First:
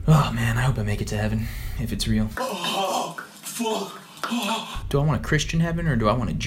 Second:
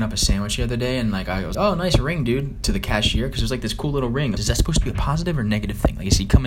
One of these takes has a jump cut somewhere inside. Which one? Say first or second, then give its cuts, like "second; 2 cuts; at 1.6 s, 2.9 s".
second; 2 cuts; at 1.5 s, 4.4 s